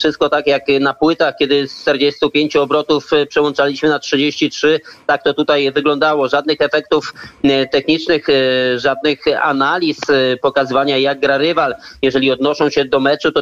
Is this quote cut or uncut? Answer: uncut